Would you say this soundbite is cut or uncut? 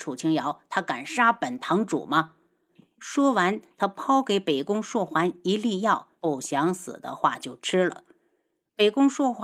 cut